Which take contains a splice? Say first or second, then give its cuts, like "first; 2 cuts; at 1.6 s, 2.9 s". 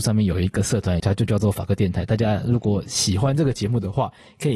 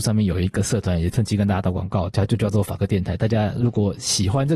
first; 1 cut; at 1.0 s